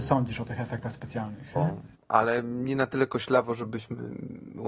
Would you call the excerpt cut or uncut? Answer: cut